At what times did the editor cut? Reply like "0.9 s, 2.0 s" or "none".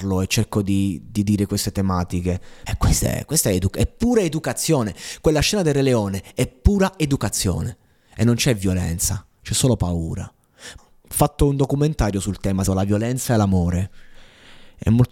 2.7 s, 10.8 s, 12.7 s

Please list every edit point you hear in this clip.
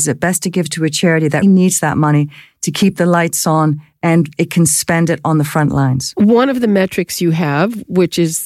1.4 s

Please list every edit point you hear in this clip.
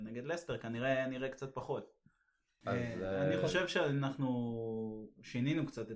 2.6 s

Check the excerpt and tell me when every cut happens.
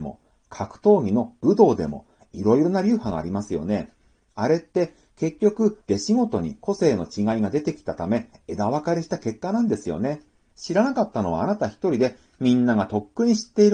5.8 s, 10.5 s

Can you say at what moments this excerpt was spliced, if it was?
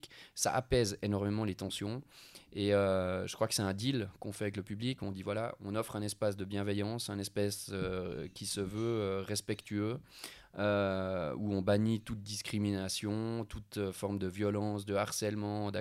none

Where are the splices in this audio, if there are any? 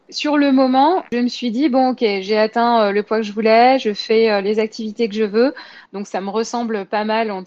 5.9 s

